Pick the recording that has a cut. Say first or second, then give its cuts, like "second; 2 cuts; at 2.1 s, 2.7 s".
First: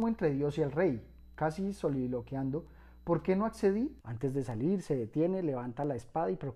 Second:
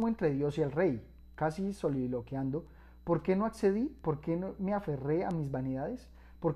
first; 1 cut; at 4.0 s